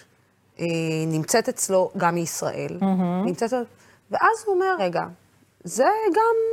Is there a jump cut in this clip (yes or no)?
yes